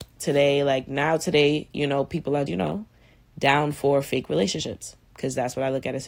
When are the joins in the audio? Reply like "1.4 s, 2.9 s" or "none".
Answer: 2.5 s

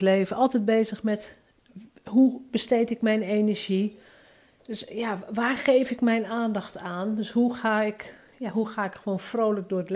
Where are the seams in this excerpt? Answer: none

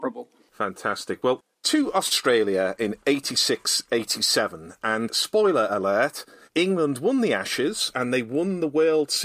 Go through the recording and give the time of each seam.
5.1 s, 7.9 s

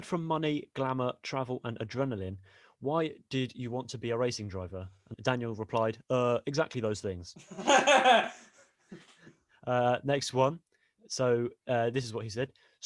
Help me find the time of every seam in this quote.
5.1 s

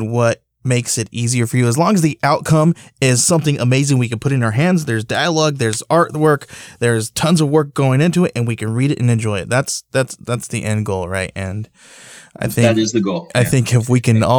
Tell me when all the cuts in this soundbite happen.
none

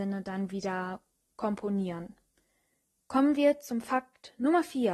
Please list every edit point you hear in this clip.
3.0 s

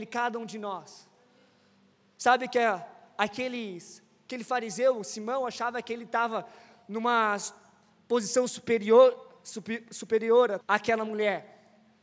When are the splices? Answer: 10.6 s

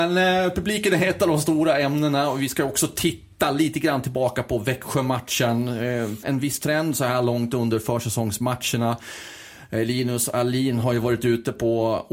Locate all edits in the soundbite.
6.2 s

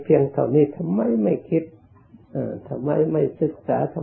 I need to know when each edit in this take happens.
2.2 s

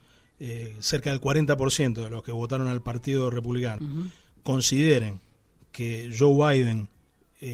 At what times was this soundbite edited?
3.8 s

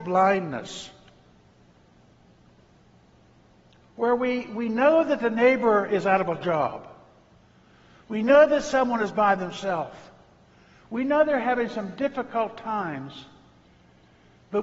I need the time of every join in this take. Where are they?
none

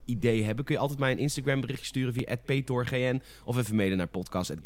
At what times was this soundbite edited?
none

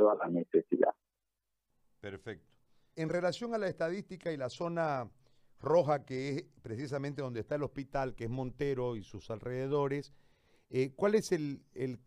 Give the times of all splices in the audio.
2.9 s

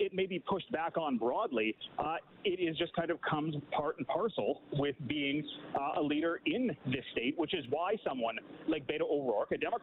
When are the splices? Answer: none

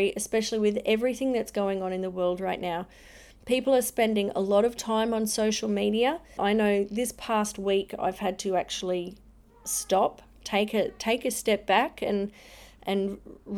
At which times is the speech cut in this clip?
6.4 s

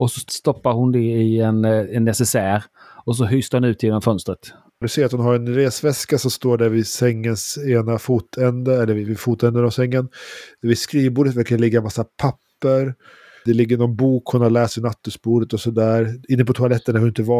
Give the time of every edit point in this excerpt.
4.8 s

